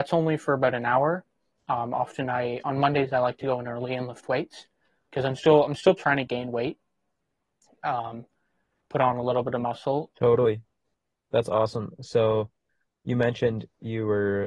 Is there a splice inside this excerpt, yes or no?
yes